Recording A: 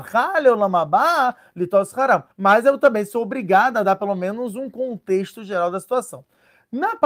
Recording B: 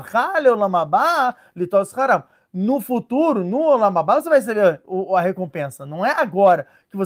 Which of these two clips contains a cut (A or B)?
A